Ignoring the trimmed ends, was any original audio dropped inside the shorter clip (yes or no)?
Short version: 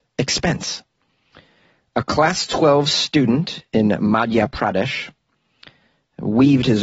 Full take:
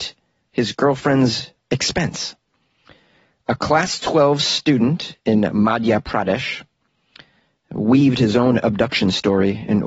no